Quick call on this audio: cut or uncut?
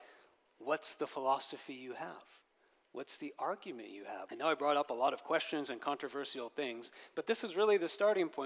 cut